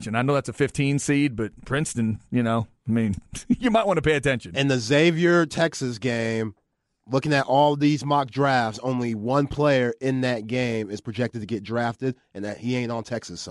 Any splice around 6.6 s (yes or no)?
no